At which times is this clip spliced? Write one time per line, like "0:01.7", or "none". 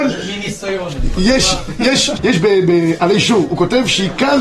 0:02.2